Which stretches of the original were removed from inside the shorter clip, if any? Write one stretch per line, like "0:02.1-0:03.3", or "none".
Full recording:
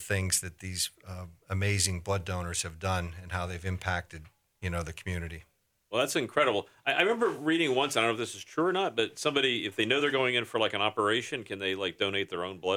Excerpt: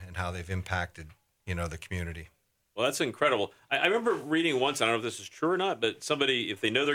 none